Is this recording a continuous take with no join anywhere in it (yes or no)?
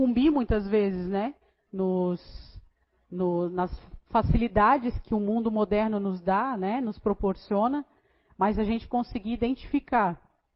yes